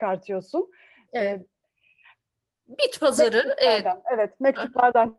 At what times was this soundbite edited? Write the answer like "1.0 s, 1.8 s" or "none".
1.5 s